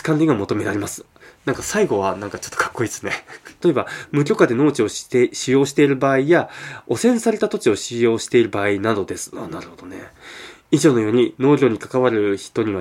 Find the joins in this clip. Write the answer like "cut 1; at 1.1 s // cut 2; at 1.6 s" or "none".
cut 1; at 3.6 s